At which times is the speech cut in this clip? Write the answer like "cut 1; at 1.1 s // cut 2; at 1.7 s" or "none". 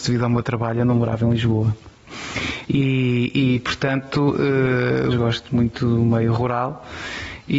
cut 1; at 2.7 s // cut 2; at 5.1 s